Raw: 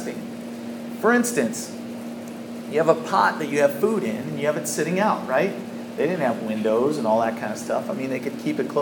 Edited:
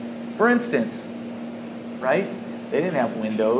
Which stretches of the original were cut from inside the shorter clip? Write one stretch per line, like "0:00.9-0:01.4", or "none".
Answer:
0:02.6-0:05.3